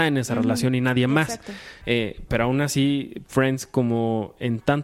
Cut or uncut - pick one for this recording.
cut